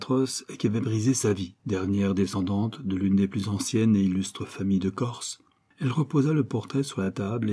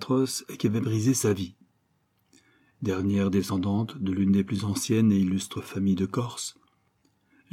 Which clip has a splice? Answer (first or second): first